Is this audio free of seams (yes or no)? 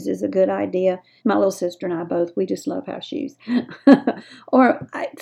no